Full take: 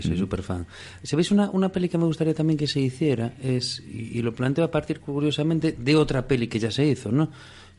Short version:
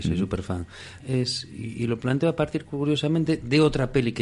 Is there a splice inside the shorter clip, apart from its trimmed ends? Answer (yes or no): yes